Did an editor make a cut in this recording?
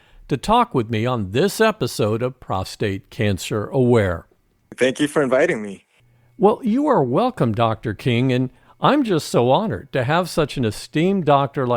no; 0 cuts

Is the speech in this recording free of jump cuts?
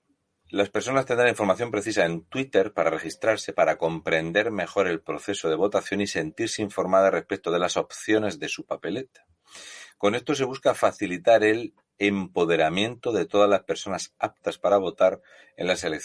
no; 1 cut; at 3.5 s

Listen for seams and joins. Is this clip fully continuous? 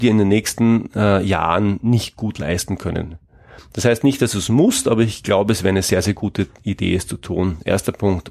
yes; 0 cuts

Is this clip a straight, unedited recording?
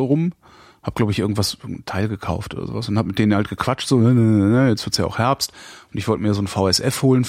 yes; 0 cuts

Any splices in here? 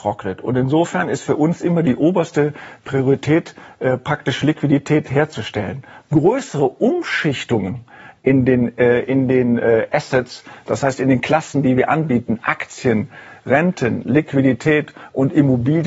no; 0 cuts

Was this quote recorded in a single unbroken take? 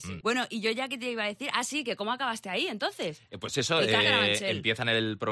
no; 1 cut; at 4.0 s

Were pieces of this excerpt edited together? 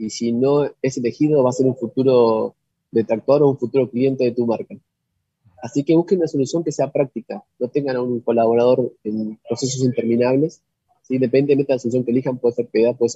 no; 0 cuts

